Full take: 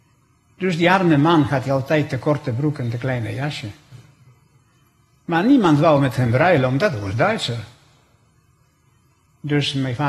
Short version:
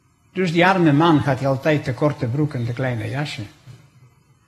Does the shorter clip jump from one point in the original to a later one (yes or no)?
no